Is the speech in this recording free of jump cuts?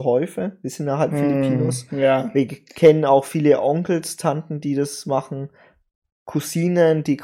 yes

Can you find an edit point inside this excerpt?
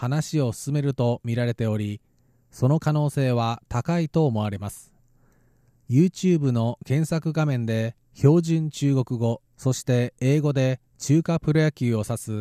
no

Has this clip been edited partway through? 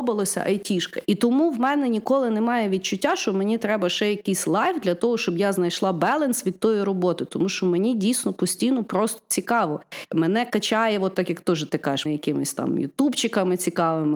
yes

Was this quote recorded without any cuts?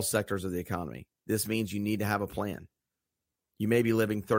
yes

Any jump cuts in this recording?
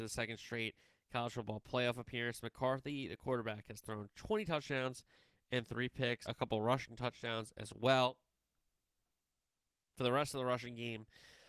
yes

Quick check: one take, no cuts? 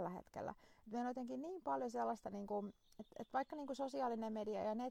yes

